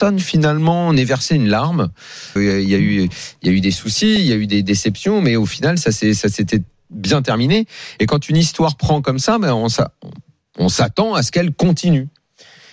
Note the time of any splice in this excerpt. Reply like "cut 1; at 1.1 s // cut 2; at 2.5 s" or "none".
cut 1; at 2.4 s